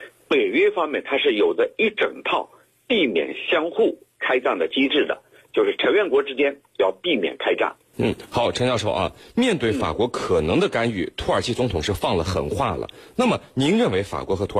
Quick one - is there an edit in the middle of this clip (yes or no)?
yes